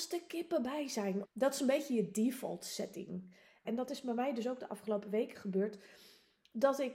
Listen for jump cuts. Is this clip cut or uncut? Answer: cut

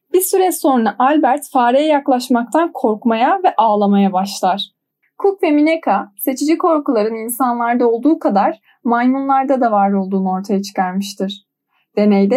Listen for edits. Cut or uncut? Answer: cut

